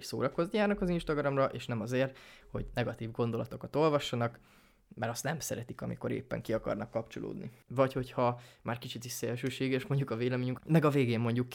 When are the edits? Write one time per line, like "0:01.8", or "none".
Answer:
0:07.7
0:10.6